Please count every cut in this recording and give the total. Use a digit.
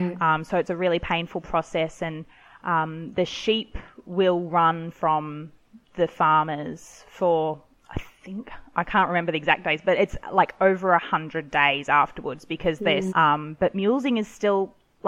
1